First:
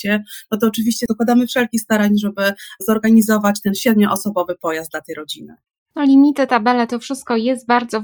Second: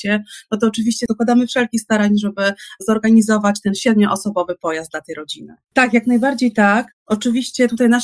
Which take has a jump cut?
second; 1 cut; at 5.7 s

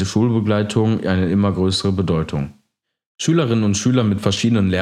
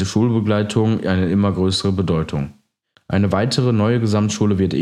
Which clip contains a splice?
second; 1 cut; at 2.9 s

